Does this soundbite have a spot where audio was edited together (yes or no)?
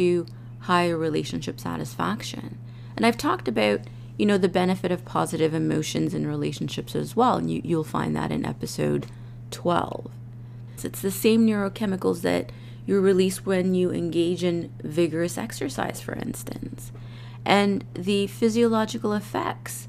yes